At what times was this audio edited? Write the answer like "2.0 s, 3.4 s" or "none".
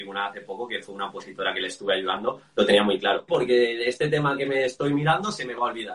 3.3 s